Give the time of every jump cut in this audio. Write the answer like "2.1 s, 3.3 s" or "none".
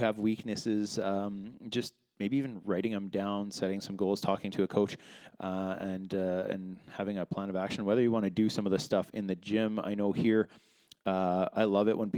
2.1 s